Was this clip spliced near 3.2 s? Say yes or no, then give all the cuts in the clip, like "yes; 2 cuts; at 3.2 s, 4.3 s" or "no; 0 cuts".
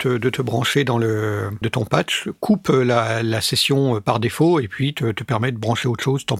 no; 1 cut; at 1.6 s